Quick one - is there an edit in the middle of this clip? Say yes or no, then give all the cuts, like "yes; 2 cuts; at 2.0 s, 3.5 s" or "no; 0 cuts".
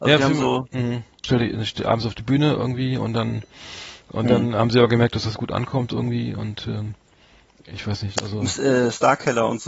yes; 1 cut; at 1.2 s